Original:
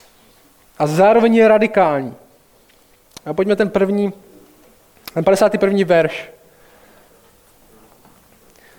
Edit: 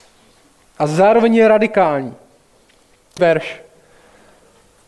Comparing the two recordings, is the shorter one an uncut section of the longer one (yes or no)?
no